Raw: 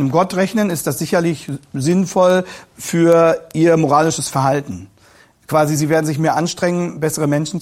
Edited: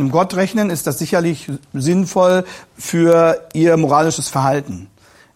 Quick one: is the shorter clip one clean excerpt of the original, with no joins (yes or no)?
yes